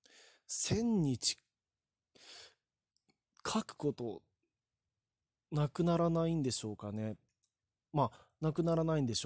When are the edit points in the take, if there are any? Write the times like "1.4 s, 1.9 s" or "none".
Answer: none